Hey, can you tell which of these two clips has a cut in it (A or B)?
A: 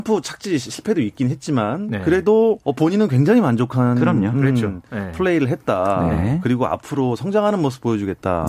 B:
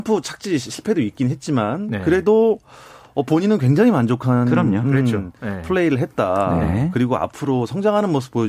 A